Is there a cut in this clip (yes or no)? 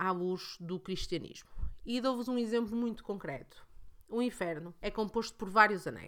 yes